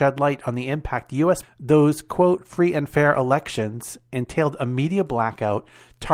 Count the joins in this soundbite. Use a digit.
1